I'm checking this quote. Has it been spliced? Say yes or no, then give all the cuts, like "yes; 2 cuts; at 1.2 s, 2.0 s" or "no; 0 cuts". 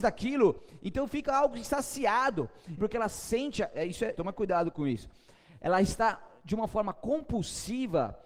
yes; 2 cuts; at 2.8 s, 4.1 s